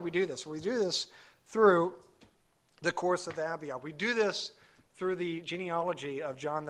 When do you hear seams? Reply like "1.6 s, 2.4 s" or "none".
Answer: none